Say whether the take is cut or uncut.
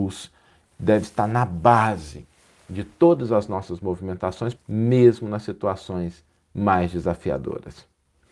cut